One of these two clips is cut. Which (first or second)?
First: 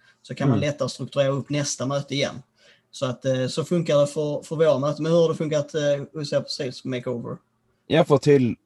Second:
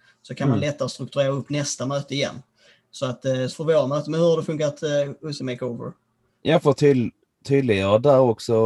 second